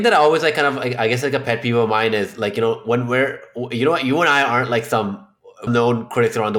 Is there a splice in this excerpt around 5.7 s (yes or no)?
yes